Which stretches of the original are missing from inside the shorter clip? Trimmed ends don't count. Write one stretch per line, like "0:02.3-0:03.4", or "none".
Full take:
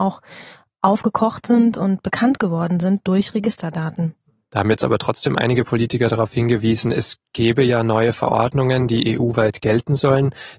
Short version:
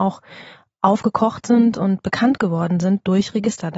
none